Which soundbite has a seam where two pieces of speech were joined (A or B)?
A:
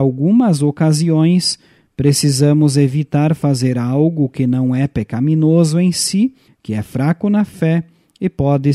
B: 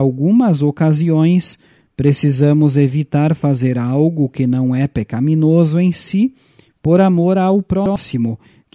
A